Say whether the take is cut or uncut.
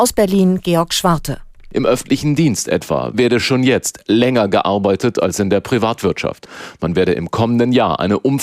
uncut